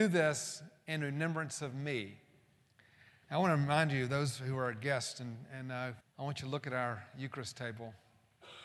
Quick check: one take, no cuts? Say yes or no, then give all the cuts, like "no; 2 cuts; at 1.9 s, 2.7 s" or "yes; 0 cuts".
no; 2 cuts; at 3.2 s, 6.0 s